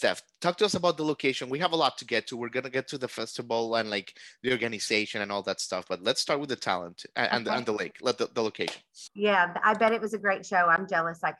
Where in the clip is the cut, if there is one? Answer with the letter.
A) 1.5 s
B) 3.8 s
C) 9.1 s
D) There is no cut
C